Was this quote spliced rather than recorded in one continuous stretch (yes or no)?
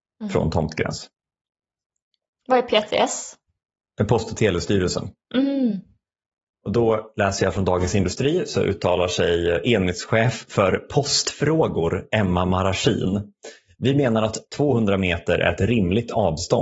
no